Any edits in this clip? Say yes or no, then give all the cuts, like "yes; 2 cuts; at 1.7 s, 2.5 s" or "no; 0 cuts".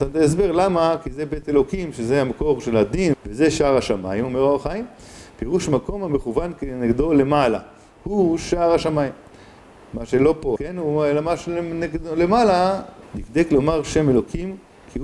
yes; 3 cuts; at 3.1 s, 10.6 s, 13.0 s